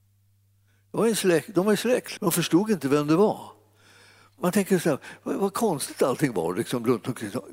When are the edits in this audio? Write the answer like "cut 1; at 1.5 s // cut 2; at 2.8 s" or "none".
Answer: cut 1; at 2.2 s // cut 2; at 4.4 s